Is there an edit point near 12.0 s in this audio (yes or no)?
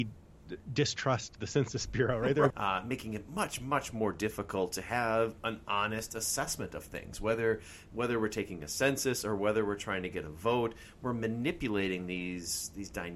no